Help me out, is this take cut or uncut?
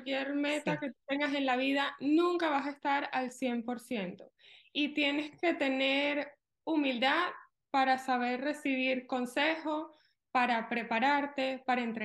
uncut